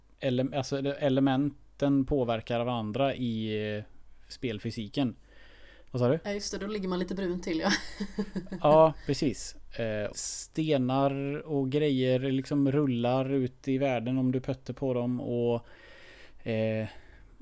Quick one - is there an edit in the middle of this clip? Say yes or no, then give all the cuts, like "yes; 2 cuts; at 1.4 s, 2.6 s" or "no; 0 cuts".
yes; 2 cuts; at 5.9 s, 10.1 s